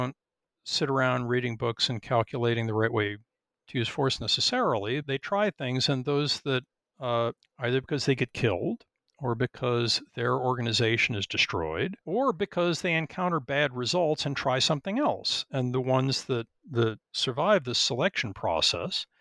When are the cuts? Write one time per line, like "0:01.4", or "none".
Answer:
0:05.0
0:07.4
0:12.0

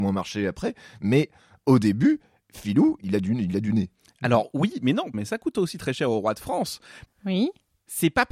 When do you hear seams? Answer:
0:05.1
0:07.1

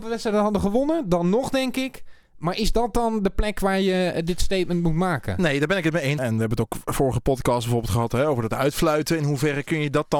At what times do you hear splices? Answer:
0:06.2

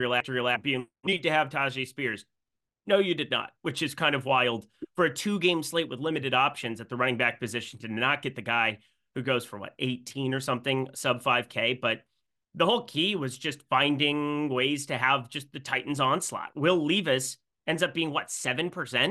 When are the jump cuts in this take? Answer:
none

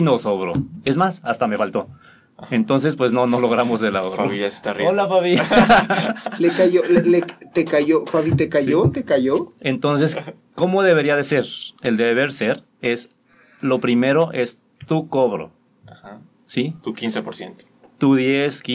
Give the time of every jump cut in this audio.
none

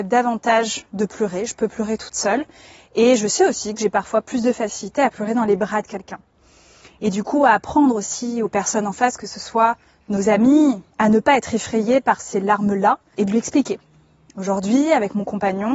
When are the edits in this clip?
0:10.9

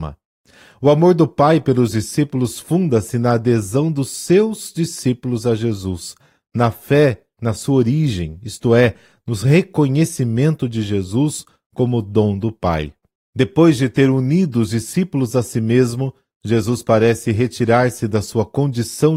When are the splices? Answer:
none

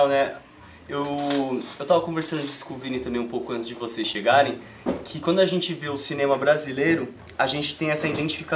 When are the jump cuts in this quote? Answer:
none

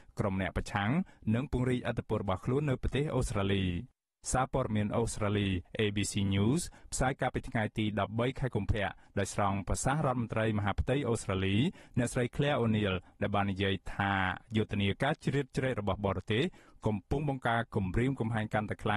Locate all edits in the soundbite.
0:17.4

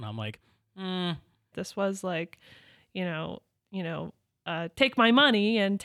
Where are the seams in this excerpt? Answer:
0:01.5
0:03.6
0:04.7

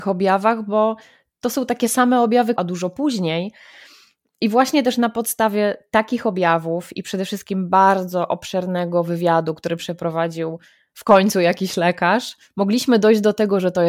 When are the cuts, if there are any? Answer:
0:02.6

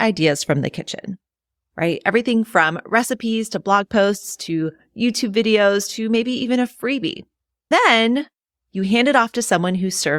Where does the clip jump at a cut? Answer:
none

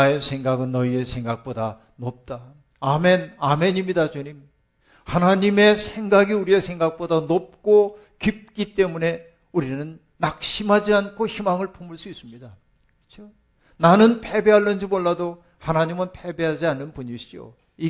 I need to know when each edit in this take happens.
none

